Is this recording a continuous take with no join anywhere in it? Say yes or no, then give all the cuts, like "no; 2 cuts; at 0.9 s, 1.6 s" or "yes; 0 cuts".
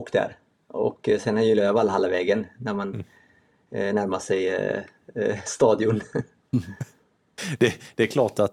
yes; 0 cuts